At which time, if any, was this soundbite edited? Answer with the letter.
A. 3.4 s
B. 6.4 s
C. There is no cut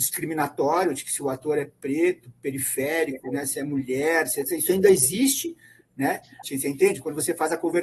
B